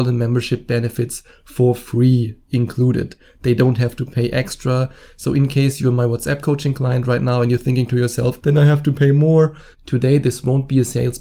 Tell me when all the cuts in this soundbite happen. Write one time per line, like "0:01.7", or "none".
0:08.4
0:09.7